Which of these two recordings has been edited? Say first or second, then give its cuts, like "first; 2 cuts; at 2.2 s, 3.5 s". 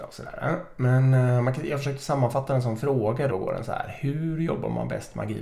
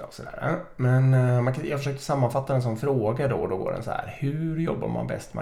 first; 1 cut; at 3.3 s